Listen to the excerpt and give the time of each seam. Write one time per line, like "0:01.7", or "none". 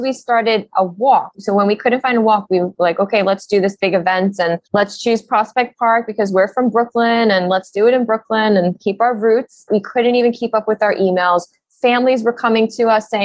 0:04.6
0:09.7